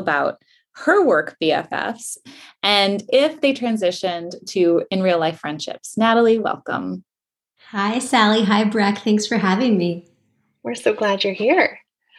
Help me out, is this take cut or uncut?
uncut